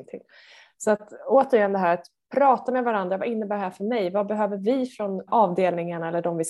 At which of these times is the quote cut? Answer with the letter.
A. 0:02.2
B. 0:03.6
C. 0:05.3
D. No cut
C